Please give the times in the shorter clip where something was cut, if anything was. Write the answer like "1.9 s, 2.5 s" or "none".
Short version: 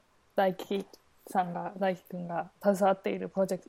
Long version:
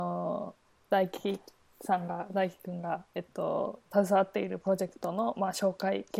2.5 s